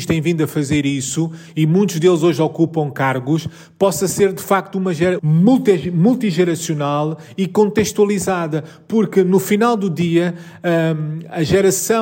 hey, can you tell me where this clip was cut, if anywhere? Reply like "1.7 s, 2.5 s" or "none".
5.2 s